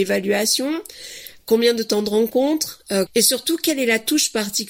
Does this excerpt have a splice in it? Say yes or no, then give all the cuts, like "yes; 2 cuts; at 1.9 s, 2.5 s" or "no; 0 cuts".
yes; 1 cut; at 3.1 s